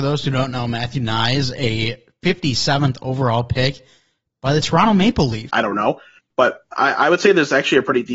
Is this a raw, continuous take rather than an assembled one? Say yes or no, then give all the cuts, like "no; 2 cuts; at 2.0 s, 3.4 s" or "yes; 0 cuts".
no; 1 cut; at 5.5 s